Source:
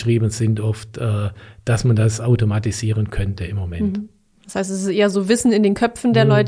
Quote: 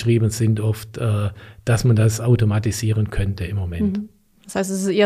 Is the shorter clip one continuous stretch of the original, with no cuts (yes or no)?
yes